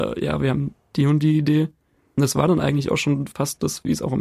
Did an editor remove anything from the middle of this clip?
no; 0 cuts

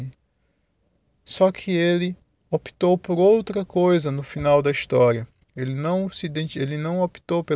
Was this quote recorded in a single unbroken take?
yes; 0 cuts

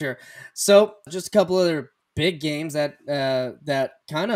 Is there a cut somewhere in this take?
yes; 1 cut; at 1.1 s

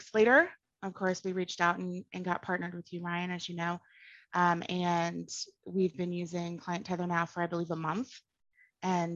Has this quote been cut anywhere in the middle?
no; 0 cuts

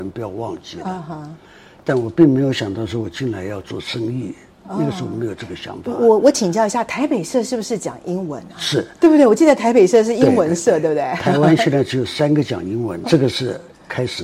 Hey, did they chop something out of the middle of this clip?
yes; 1 cut; at 13.0 s

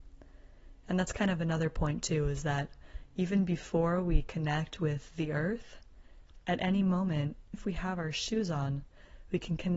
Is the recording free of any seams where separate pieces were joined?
no; 2 cuts; at 6.4 s, 7.5 s

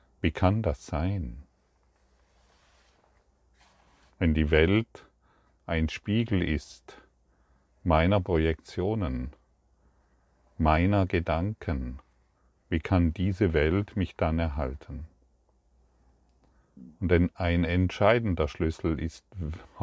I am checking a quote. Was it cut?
no; 0 cuts

